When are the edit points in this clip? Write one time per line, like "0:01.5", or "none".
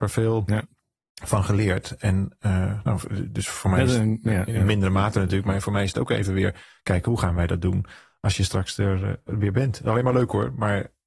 none